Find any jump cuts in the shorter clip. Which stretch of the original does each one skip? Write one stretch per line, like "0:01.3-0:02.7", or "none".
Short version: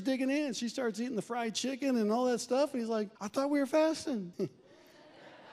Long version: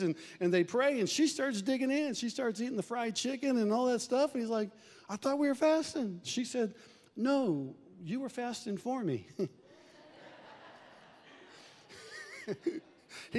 0:04.8-0:05.0
0:06.2-0:09.3